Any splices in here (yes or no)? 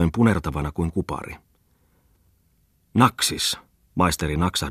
no